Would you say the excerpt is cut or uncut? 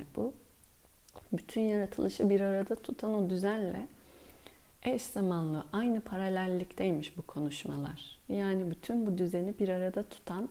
uncut